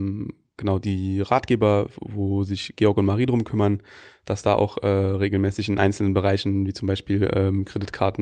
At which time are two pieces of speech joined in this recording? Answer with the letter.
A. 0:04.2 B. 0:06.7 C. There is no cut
C